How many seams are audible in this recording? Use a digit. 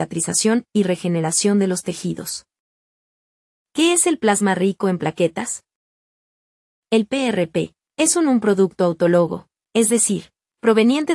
0